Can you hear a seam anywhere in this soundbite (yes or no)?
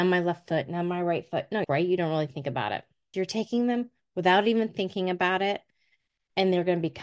yes